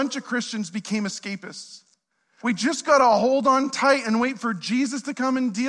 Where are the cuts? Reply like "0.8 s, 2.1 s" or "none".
2.4 s